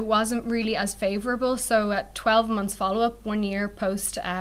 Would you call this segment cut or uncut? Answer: uncut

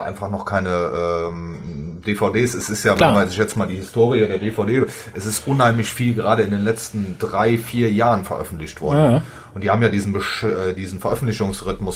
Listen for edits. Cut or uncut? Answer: uncut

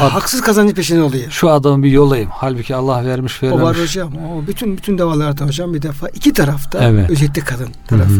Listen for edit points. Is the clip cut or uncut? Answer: uncut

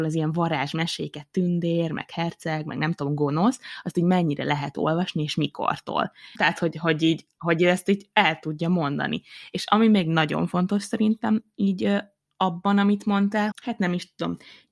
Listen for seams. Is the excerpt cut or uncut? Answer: cut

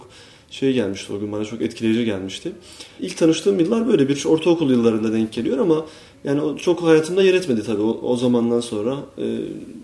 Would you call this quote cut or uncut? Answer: uncut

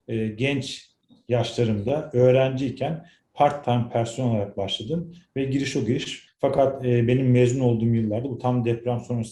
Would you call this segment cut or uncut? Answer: cut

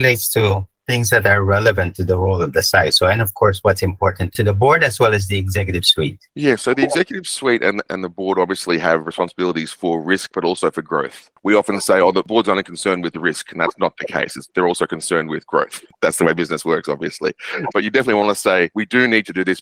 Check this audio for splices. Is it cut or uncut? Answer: cut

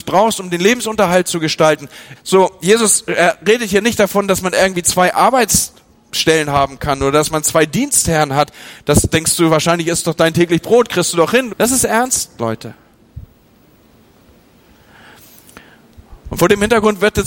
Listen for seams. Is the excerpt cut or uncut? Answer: cut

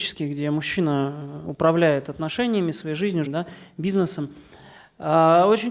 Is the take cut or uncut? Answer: cut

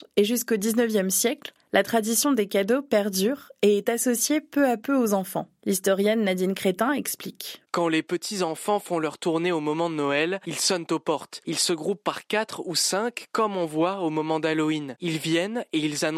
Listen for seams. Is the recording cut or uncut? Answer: uncut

